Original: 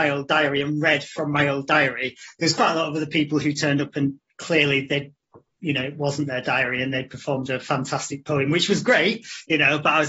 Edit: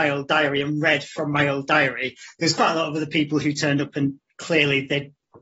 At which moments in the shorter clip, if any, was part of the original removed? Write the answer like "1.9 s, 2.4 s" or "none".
none

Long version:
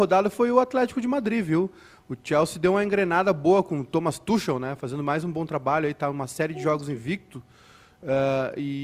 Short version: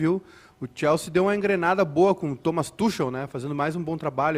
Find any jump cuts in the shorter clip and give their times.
none

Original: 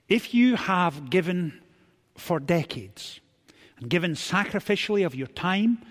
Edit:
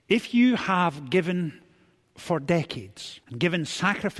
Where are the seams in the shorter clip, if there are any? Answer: 3.2 s

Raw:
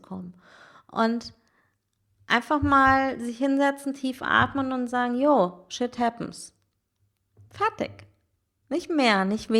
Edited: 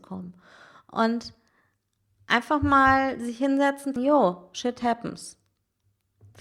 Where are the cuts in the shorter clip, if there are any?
4.0 s

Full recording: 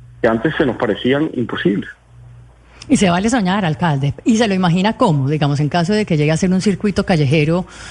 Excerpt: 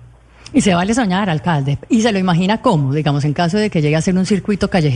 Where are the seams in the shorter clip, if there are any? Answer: none

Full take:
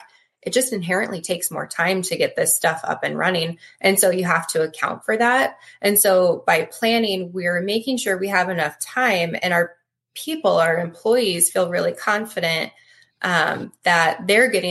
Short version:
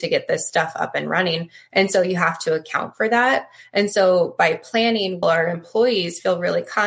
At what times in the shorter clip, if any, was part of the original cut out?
5.2 s

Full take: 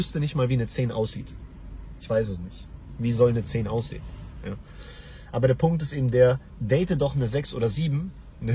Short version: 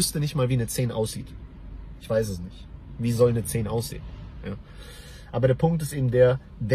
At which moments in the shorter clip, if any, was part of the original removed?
none

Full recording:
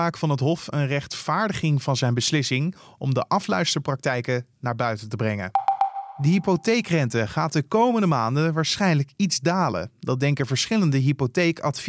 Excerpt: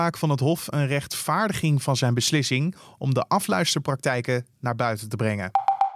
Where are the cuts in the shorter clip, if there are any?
none

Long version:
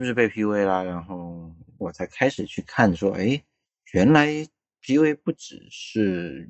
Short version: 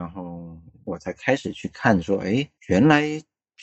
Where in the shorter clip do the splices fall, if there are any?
2.6 s

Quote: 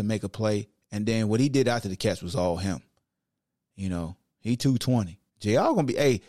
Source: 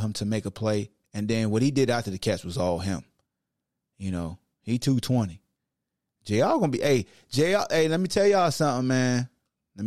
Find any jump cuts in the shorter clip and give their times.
5.3 s

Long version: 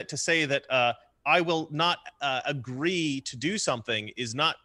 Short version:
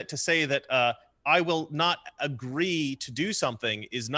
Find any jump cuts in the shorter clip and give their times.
2.2 s

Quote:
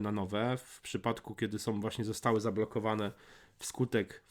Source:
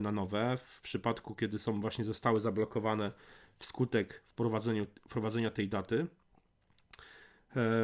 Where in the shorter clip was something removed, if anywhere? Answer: none

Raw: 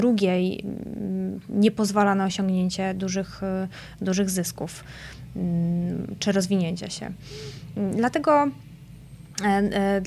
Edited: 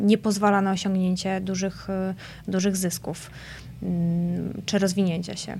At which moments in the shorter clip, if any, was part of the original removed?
none

